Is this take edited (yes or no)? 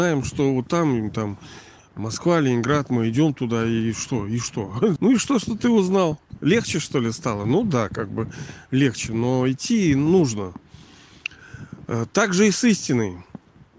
yes